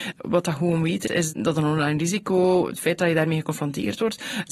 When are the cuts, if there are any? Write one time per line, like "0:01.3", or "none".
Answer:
0:01.1